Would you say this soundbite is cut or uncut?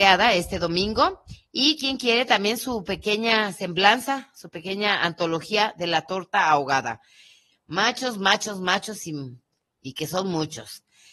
cut